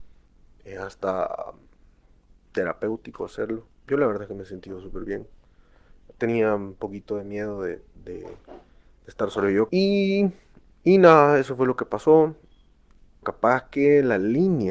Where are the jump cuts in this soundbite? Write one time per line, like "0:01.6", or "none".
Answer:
0:09.7
0:13.2